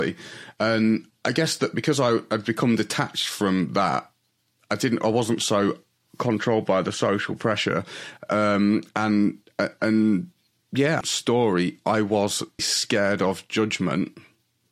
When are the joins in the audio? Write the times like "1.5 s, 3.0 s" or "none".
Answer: 11.0 s, 12.6 s